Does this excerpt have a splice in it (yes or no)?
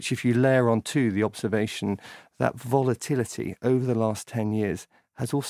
no